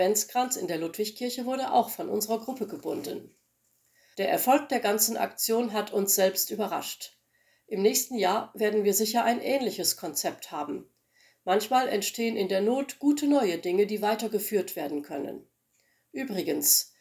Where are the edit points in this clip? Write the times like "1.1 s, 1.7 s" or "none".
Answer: 4.1 s